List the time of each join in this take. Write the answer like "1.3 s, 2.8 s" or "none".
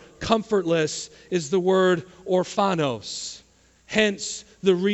none